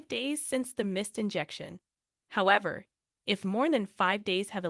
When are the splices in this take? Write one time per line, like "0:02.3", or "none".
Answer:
none